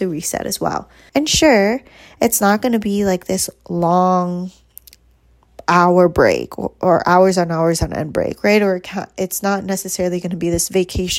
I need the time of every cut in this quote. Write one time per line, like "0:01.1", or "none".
0:01.1